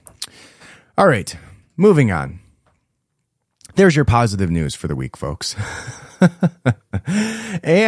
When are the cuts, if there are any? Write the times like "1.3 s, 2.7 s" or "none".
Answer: none